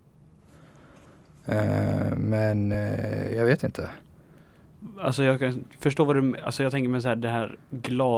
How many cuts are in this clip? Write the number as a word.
zero